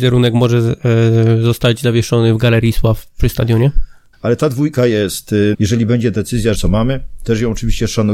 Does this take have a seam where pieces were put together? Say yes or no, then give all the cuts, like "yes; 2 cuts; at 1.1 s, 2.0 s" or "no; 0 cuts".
yes; 3 cuts; at 4.1 s, 5.5 s, 6.5 s